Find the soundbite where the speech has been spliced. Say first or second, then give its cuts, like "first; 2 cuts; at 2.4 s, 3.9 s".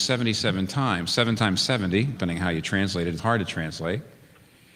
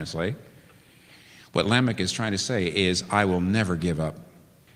first; 2 cuts; at 2.2 s, 3.2 s